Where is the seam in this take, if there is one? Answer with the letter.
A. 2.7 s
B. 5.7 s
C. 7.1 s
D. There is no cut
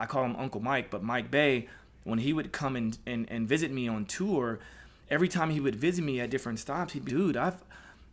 C